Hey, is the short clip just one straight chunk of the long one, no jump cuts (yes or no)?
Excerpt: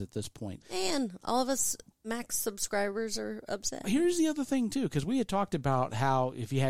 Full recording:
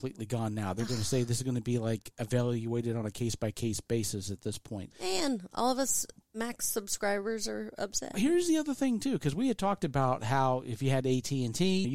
yes